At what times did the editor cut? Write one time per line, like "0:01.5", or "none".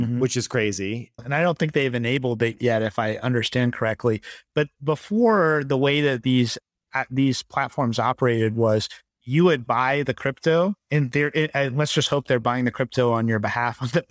0:01.2